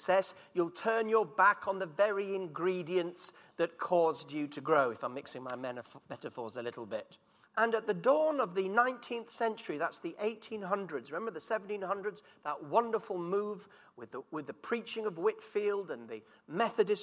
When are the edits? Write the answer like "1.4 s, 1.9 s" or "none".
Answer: 7.4 s